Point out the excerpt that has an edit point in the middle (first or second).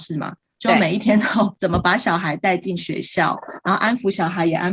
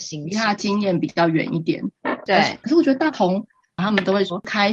second